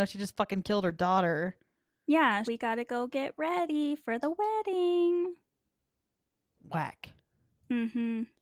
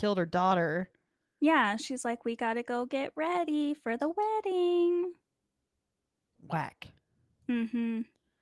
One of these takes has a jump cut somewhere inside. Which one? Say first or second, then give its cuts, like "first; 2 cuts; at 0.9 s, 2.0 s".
first; 1 cut; at 2.4 s